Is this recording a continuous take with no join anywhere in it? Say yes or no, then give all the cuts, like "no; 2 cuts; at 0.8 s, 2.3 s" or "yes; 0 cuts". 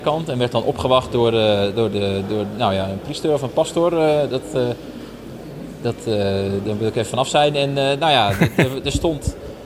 yes; 0 cuts